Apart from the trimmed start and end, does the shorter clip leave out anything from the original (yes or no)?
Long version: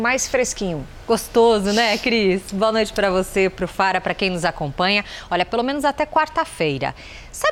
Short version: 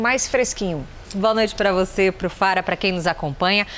yes